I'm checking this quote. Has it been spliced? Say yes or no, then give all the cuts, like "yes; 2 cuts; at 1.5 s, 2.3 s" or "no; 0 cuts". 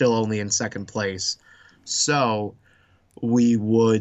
no; 0 cuts